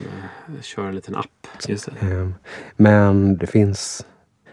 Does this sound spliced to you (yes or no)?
yes